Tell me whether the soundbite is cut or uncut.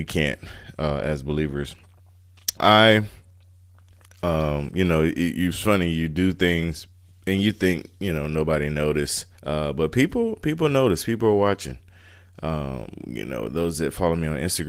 cut